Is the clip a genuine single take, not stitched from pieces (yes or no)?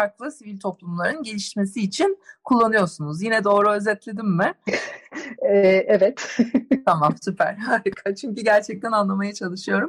yes